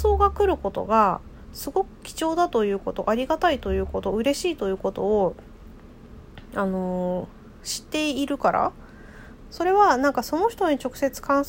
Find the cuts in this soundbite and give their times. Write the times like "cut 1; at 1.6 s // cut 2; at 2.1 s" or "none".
cut 1; at 9.5 s